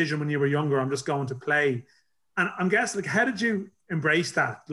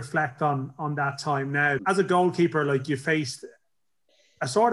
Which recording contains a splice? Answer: second; 1 cut; at 1.8 s

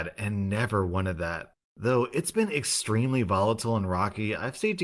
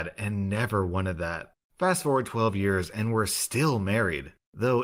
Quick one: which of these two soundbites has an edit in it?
first; 1 cut; at 1.7 s

